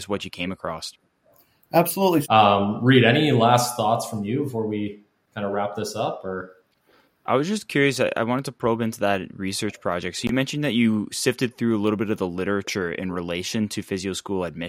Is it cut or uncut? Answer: cut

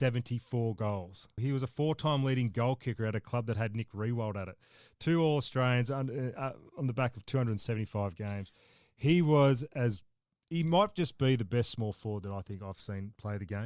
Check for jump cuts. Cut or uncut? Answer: cut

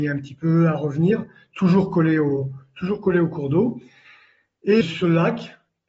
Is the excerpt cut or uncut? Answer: cut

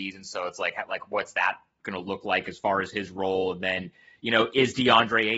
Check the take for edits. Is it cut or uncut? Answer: uncut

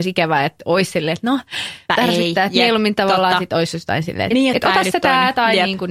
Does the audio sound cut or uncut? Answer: cut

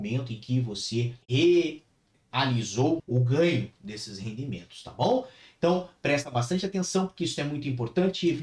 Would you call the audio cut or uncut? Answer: cut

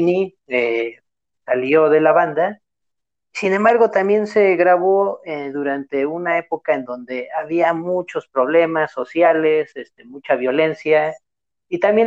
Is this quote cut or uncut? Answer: uncut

